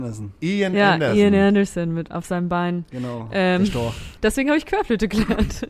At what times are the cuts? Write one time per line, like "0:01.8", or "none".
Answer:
none